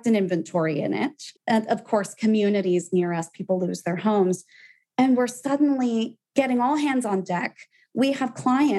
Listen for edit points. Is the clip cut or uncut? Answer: cut